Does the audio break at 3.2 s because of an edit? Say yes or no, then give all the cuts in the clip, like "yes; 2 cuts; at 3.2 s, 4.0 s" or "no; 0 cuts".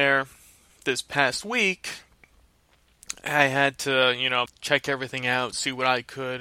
no; 1 cut; at 4.5 s